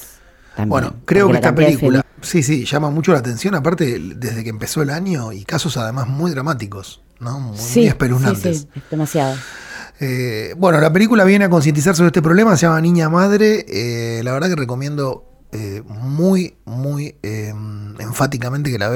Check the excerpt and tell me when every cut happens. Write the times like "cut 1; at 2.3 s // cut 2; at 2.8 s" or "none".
cut 1; at 2.0 s